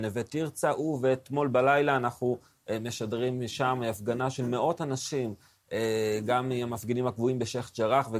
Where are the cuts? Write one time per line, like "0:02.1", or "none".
none